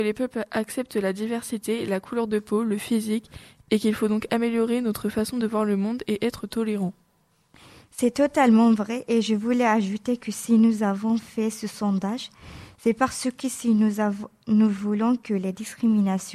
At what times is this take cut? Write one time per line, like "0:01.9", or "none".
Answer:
none